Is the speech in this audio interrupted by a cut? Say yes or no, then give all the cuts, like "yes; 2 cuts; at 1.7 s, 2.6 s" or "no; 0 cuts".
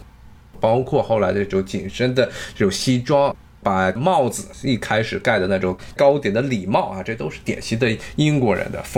no; 0 cuts